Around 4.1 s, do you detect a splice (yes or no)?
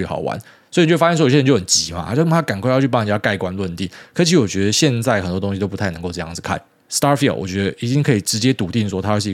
no